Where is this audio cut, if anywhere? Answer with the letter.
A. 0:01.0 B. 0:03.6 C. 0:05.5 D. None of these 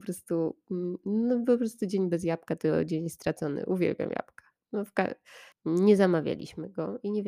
C